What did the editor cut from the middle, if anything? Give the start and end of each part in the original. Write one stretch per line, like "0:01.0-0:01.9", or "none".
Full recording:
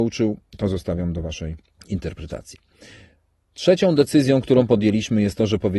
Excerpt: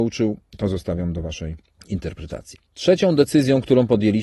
0:02.7-0:03.5